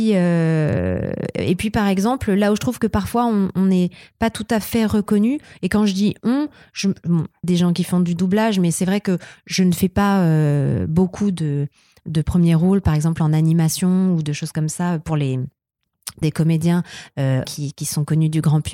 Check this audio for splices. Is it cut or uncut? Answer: cut